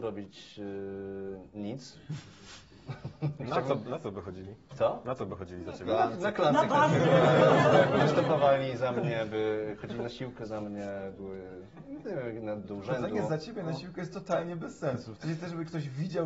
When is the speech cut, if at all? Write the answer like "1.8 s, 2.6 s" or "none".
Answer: 12.6 s, 15.2 s